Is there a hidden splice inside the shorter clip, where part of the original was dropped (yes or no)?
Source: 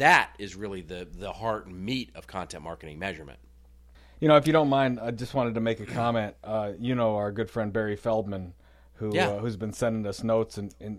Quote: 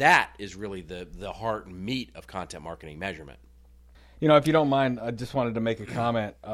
no